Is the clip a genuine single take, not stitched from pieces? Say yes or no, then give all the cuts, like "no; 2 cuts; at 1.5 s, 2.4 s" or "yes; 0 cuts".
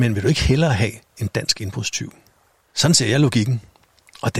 no; 1 cut; at 2.7 s